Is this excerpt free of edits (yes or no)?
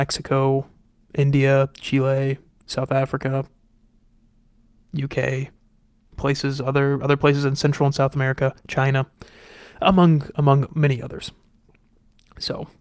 yes